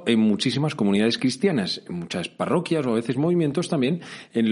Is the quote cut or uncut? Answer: uncut